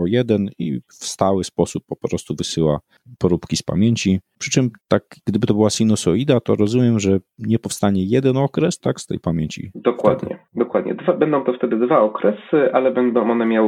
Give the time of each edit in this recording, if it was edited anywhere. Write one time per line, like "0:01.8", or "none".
0:08.8